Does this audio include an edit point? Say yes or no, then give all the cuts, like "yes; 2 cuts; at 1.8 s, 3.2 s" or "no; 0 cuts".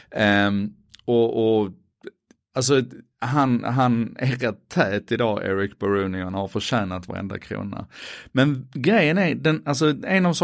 no; 0 cuts